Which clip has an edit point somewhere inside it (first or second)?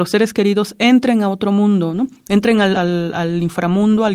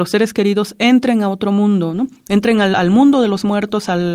first